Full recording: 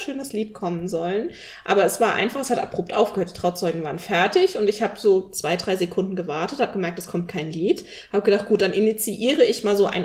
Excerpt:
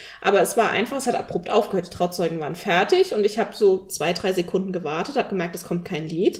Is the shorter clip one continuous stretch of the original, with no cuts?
yes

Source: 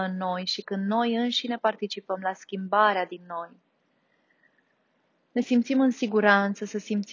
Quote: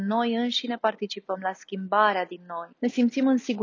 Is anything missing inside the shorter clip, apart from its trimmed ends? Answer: yes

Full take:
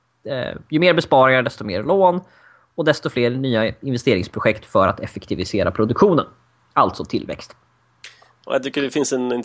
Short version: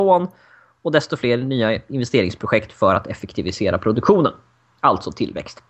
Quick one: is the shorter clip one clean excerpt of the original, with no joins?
yes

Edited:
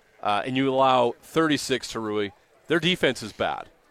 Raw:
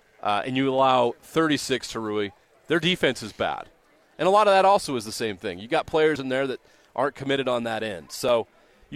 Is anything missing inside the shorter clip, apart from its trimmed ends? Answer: no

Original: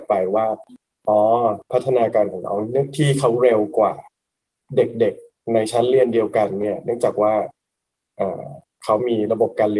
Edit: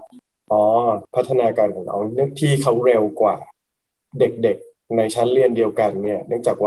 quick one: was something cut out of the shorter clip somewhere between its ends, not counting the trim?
no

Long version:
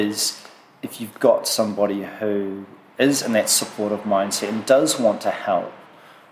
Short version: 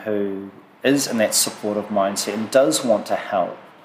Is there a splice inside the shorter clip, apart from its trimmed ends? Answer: no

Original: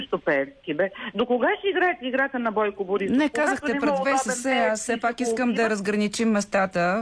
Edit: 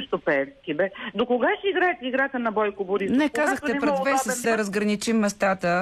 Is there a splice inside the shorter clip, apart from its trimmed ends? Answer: yes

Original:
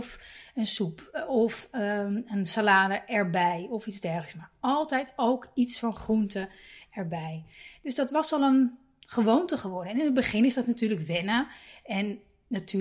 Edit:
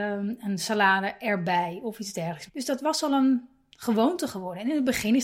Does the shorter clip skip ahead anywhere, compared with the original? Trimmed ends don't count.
yes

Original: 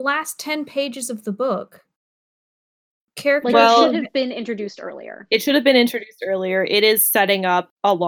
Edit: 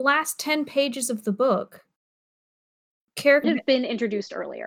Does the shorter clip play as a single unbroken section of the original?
no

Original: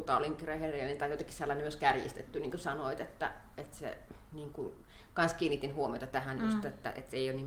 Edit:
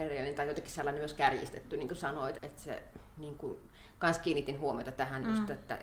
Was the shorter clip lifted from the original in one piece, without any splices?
no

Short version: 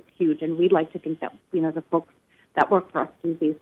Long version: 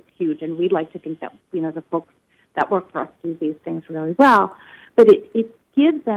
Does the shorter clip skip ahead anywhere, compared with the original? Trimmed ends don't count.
no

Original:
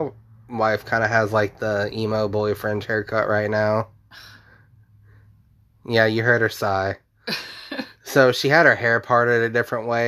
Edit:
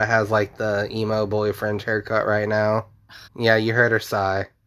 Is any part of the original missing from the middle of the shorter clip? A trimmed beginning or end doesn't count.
yes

